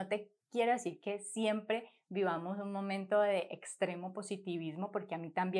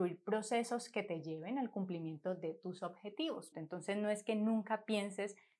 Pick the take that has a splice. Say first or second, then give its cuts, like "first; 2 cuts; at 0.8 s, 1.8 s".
second; 1 cut; at 3.5 s